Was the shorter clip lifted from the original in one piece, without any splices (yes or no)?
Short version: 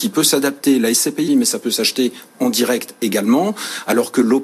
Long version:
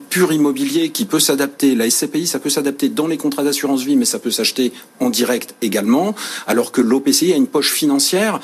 no